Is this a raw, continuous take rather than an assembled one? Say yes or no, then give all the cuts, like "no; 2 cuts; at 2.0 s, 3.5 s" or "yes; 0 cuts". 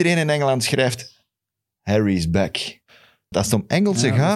no; 1 cut; at 3.3 s